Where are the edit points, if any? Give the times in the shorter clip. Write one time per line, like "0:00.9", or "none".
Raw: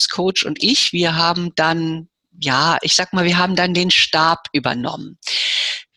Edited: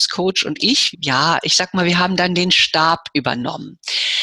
0:00.9